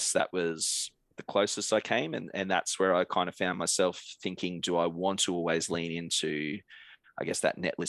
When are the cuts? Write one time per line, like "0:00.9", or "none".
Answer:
none

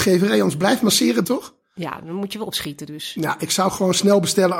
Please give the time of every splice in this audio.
0:01.2

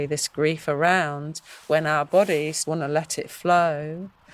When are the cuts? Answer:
0:02.6

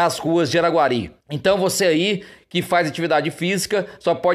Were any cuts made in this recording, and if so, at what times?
0:01.2

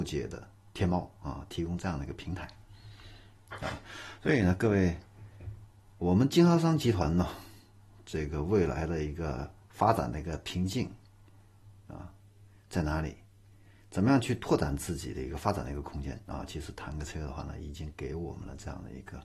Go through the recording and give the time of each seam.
none

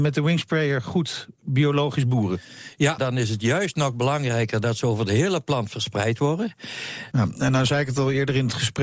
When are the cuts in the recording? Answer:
0:03.0
0:07.1

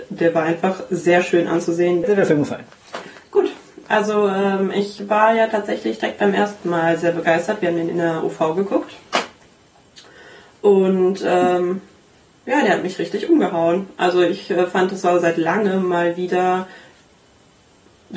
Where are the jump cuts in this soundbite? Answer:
0:02.0

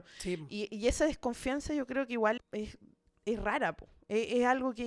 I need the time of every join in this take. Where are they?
0:02.4

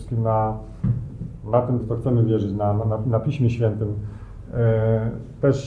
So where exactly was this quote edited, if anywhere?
0:01.8

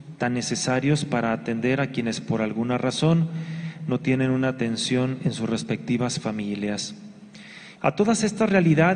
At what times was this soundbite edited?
0:07.7

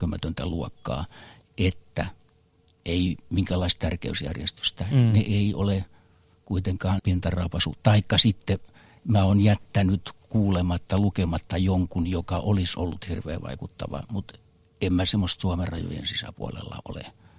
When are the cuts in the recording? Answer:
0:07.0

